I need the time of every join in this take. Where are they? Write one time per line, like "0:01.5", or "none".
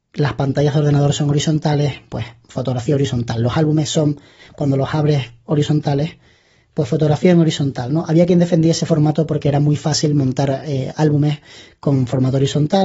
none